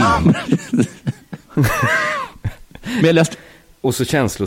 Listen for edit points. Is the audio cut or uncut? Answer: uncut